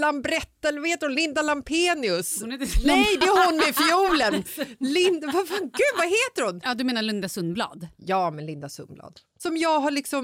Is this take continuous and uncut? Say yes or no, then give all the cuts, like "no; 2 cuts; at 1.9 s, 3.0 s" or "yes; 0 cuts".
no; 1 cut; at 4.3 s